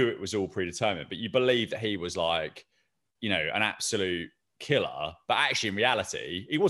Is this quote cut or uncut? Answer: uncut